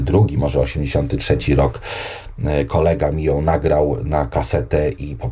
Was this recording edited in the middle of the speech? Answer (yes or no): no